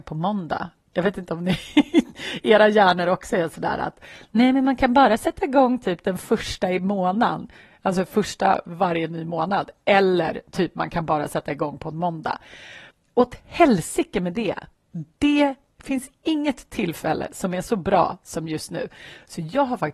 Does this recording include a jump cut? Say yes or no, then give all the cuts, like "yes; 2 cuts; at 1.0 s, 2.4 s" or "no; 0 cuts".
no; 0 cuts